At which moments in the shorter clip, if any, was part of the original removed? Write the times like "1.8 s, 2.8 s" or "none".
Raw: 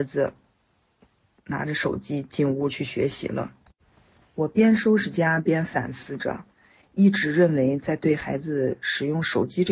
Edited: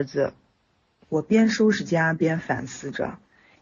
1.0 s

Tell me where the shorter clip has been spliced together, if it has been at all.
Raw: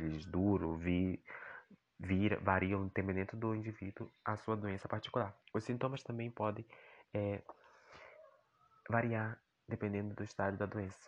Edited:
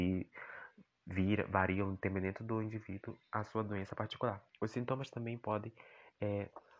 none

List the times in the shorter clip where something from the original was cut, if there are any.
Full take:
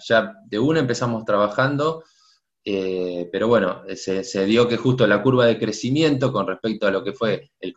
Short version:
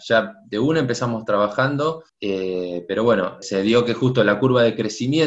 2.1 s, 3.4 s

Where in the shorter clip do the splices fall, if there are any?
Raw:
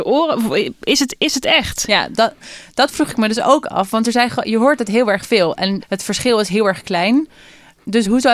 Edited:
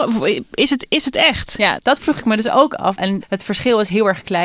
1.8 s, 3.0 s

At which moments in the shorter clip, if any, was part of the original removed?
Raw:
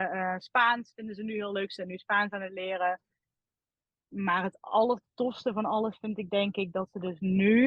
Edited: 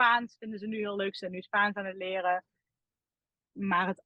none

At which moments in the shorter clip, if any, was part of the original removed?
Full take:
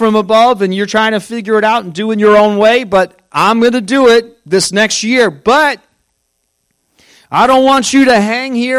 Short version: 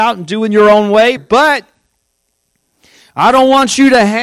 1.2 s

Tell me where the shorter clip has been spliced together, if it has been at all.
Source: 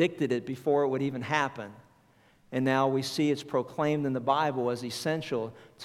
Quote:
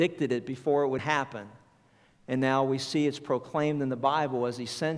1.0 s

